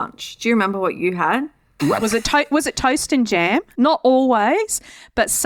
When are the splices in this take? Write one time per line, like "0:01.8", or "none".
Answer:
0:01.8
0:03.7